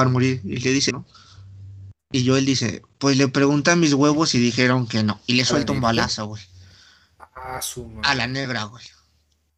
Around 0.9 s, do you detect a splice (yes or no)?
yes